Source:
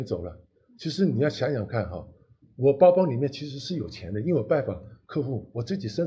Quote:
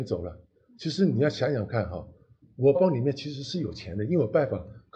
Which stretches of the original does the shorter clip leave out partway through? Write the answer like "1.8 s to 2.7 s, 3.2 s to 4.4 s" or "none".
2.7 s to 2.9 s